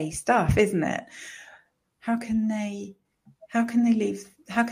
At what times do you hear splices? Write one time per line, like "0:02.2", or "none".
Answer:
0:01.8